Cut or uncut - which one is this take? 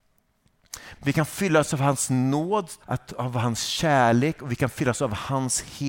cut